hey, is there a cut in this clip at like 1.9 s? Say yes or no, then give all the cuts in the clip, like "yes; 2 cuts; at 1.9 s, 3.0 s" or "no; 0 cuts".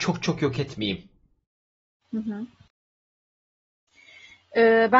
no; 0 cuts